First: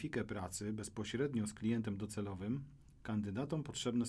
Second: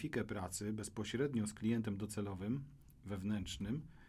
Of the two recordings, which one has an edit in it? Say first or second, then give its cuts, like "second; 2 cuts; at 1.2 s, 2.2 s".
first; 1 cut; at 3.0 s